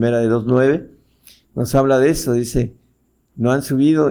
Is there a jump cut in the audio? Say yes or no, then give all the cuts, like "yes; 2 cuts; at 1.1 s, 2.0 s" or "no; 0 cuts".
no; 0 cuts